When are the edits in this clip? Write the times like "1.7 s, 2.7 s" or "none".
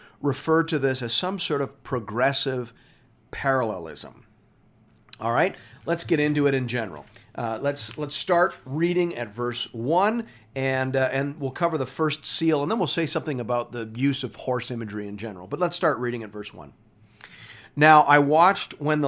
none